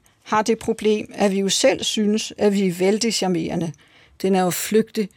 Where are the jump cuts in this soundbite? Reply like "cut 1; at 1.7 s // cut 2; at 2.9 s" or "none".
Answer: cut 1; at 4.2 s